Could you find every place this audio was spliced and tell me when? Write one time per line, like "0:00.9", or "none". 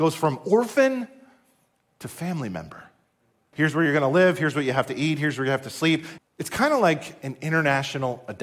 0:03.5
0:06.2